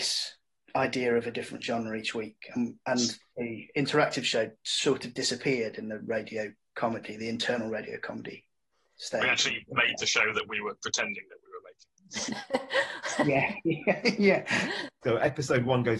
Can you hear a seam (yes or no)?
yes